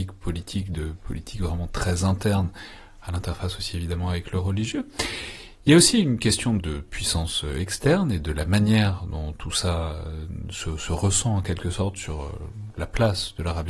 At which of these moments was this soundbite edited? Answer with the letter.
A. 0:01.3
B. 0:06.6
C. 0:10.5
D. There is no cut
B